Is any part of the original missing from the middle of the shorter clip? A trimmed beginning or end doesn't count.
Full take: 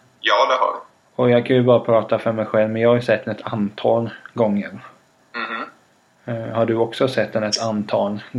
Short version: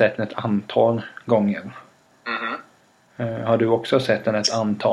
no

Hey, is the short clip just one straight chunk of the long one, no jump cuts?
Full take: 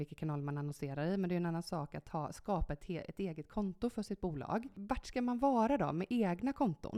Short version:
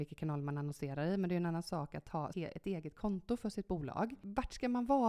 no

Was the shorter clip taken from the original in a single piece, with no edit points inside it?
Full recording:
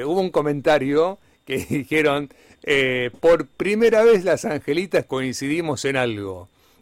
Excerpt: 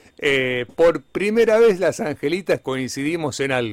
yes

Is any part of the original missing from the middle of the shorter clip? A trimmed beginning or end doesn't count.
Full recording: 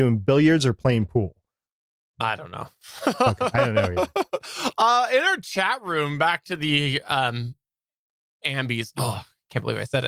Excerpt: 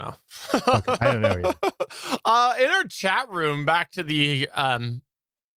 no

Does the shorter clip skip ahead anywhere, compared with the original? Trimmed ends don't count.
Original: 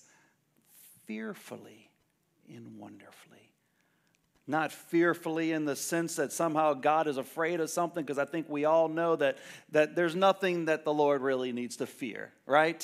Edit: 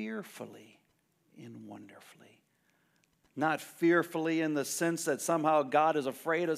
no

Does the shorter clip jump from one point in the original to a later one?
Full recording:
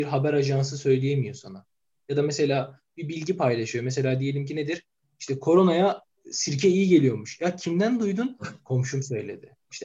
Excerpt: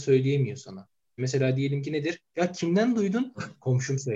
yes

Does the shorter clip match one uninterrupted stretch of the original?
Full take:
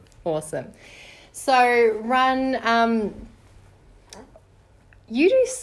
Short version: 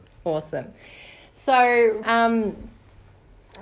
no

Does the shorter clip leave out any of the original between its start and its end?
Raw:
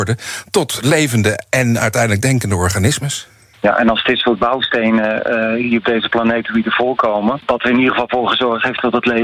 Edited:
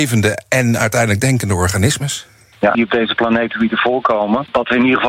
yes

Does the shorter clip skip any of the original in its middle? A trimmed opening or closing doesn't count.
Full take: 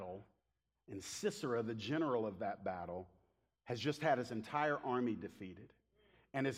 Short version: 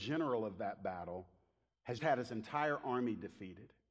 yes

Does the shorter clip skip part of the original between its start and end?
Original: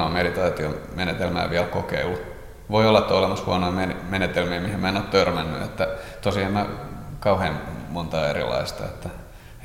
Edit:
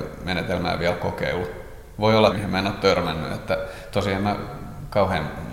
yes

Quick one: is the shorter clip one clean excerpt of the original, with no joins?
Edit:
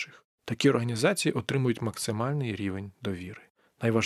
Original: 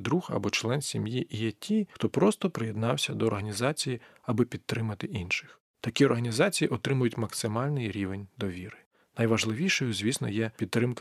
yes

